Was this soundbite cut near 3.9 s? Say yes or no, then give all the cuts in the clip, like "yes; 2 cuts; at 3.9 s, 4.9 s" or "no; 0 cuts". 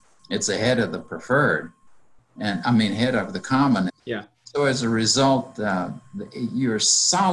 yes; 1 cut; at 3.9 s